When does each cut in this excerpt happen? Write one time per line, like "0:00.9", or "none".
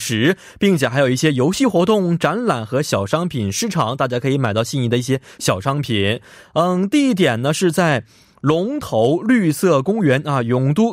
none